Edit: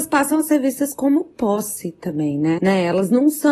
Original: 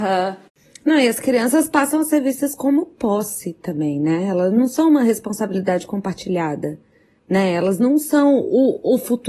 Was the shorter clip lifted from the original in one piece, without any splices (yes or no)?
no